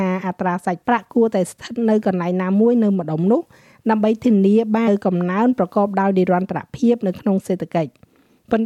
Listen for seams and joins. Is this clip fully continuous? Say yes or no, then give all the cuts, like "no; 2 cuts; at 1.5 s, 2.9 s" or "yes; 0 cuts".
no; 1 cut; at 4.9 s